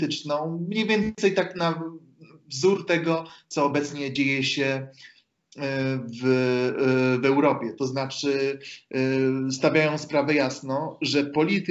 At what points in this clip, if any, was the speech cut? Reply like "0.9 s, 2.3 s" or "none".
none